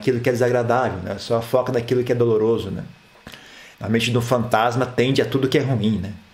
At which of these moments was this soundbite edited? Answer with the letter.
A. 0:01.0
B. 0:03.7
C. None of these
B